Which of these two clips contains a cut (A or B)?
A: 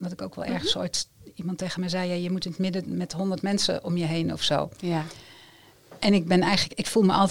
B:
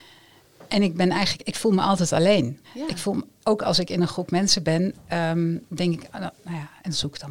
B